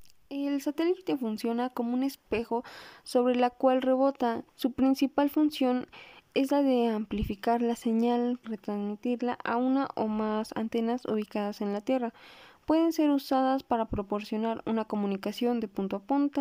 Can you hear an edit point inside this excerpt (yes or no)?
yes